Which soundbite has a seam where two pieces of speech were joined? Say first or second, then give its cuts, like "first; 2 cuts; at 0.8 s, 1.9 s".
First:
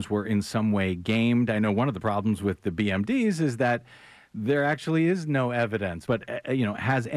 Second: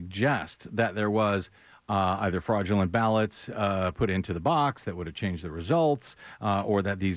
first; 1 cut; at 6.1 s